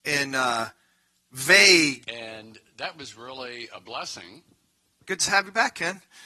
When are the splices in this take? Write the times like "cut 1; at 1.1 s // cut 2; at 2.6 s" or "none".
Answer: cut 1; at 2.0 s // cut 2; at 5.0 s

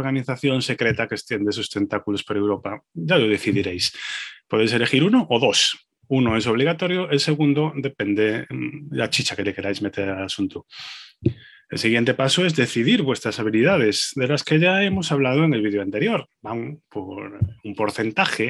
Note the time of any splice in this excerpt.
cut 1; at 16.3 s

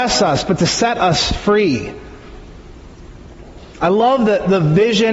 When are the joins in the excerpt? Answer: none

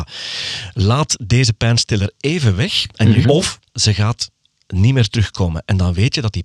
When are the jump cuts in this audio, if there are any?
cut 1; at 3.2 s

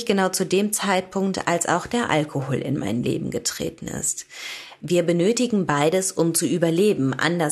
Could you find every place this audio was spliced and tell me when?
cut 1; at 4.8 s

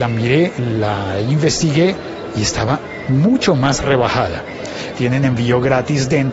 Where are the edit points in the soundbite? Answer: cut 1; at 4.9 s

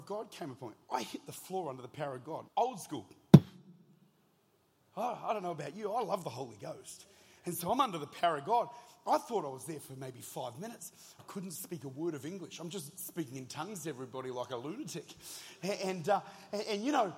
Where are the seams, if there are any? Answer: cut 1; at 2.5 s // cut 2; at 11.2 s

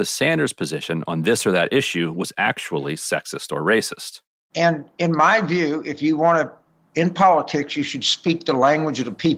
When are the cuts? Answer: cut 1; at 4.5 s

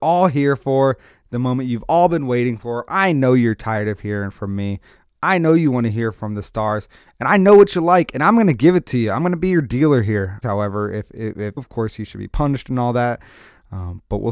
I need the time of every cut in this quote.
cut 1; at 10.4 s // cut 2; at 11.6 s

